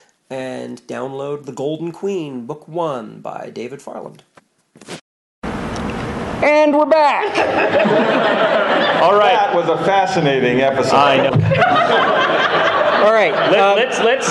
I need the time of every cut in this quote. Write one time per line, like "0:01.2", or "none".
0:11.3